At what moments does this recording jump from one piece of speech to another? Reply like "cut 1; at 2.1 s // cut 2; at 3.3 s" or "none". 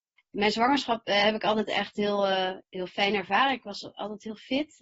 cut 1; at 2.6 s